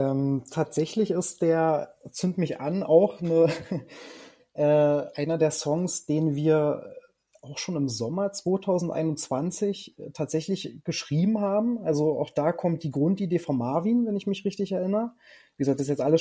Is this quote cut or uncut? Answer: uncut